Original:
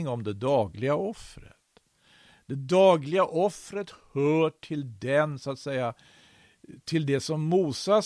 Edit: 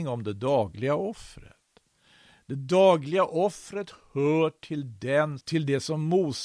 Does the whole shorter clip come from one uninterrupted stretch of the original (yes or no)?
no